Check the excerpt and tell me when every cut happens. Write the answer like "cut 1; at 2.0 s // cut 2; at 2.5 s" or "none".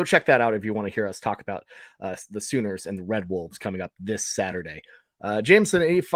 none